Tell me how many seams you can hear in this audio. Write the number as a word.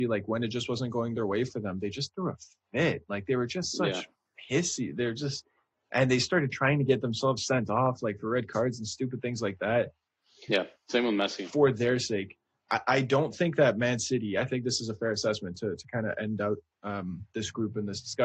one